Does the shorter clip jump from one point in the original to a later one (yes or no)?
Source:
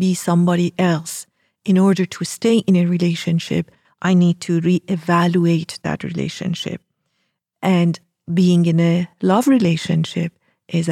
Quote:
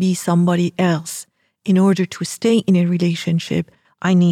no